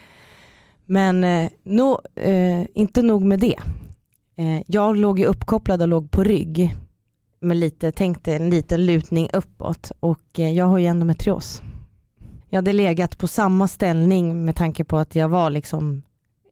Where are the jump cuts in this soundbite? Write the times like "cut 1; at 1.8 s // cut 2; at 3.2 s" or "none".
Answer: cut 1; at 12.4 s

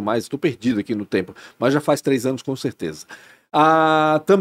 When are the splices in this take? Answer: none

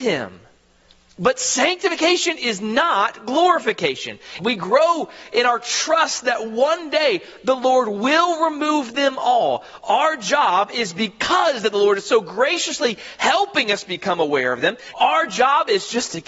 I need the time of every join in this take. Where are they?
cut 1; at 4.4 s // cut 2; at 14.9 s

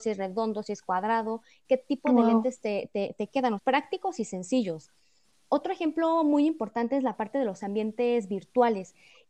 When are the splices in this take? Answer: cut 1; at 3.6 s

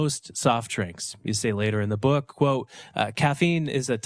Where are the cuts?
none

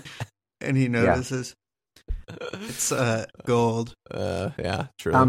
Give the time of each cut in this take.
cut 1; at 3.4 s

